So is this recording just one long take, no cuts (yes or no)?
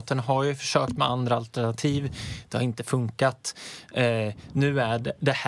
yes